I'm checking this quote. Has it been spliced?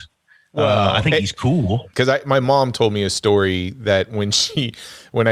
yes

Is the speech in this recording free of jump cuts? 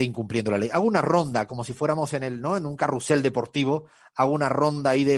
yes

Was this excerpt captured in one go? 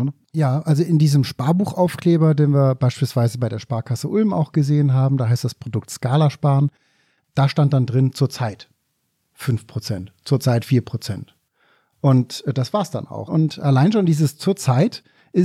no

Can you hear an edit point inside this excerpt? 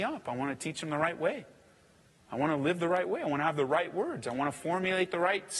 no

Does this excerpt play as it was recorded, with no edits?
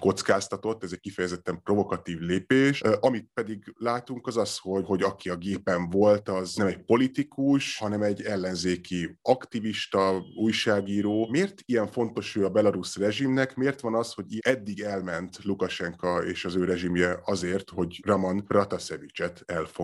yes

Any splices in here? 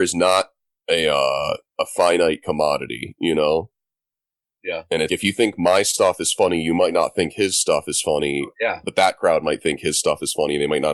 yes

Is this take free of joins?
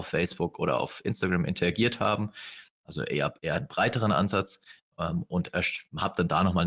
yes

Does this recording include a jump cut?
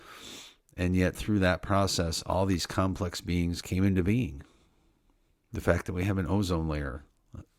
yes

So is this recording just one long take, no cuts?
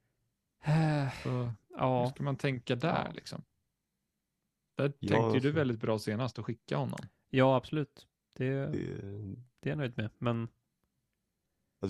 yes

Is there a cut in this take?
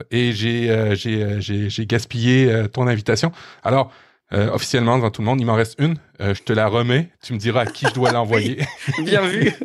no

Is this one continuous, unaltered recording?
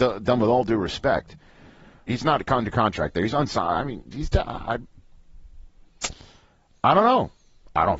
no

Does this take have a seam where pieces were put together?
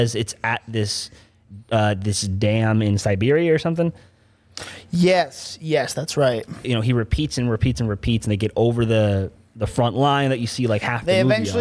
yes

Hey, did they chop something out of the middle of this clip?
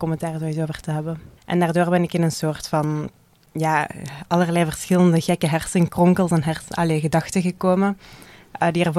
yes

